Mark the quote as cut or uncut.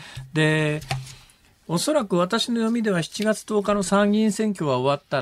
uncut